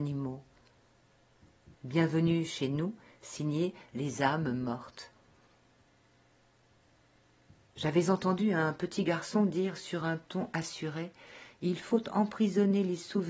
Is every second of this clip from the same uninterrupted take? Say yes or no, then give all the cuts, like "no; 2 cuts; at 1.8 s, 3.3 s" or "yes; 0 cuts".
no; 1 cut; at 1.7 s